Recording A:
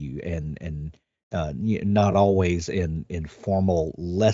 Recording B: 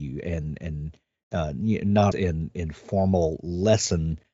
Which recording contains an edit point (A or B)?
B